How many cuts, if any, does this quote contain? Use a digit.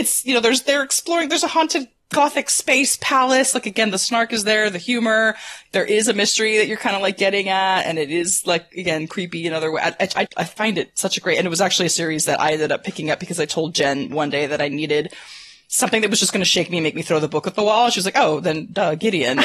1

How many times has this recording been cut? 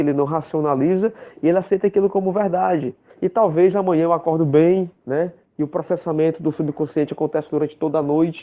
2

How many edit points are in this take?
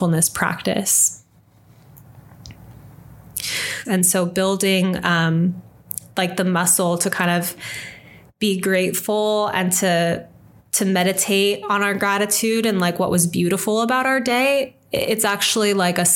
1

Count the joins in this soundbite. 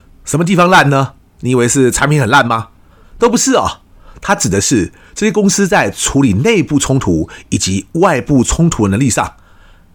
1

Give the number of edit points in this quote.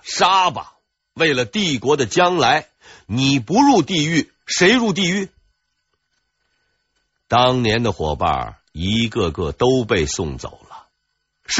0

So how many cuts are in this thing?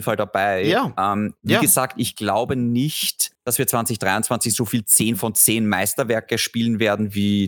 1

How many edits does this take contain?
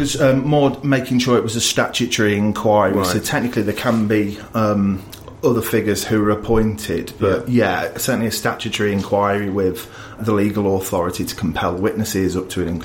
1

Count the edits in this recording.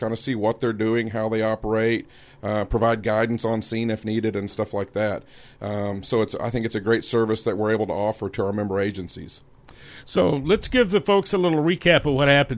0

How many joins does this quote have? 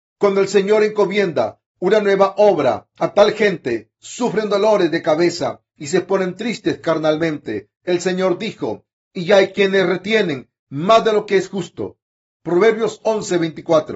2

